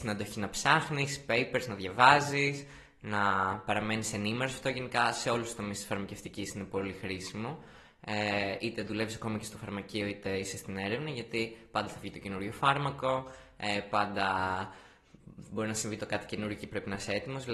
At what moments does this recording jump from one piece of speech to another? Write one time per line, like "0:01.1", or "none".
none